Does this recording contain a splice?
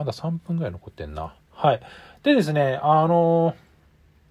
no; 0 cuts

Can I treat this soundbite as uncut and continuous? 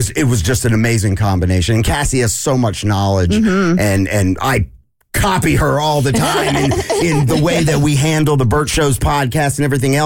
yes; 0 cuts

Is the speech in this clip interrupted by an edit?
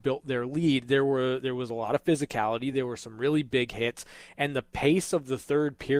no; 0 cuts

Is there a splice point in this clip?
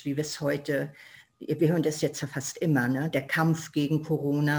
no; 0 cuts

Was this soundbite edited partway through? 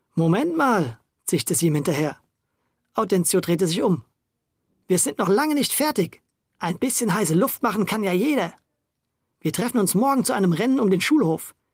no; 0 cuts

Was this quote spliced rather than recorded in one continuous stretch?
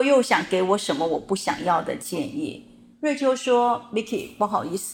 yes; 1 cut; at 2.9 s

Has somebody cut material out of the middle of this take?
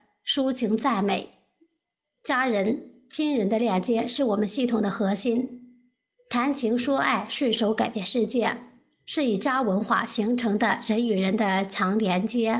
no; 0 cuts

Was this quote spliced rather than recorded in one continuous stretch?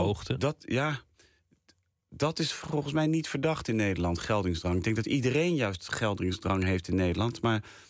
no; 0 cuts

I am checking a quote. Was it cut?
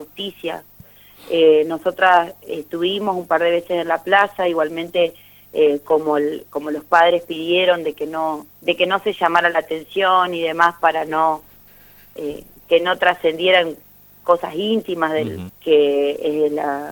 yes; 2 cuts; at 8.5 s, 15.5 s

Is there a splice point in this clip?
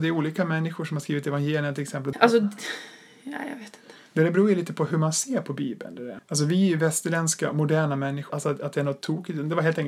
yes; 3 cuts; at 2.1 s, 6.2 s, 8.3 s

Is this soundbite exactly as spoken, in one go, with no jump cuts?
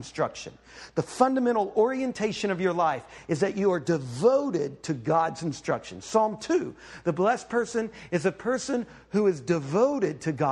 yes; 0 cuts

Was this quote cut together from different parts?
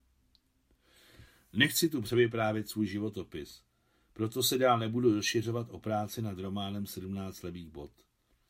no; 0 cuts

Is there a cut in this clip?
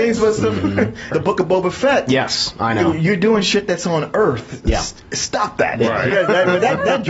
yes; 2 cuts; at 1.1 s, 6.1 s

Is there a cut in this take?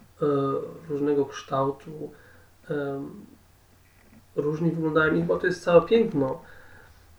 no; 0 cuts

